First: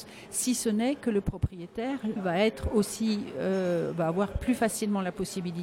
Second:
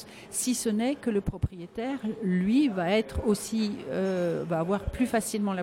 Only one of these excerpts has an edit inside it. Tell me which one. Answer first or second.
first